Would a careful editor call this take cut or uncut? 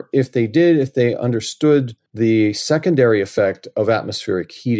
cut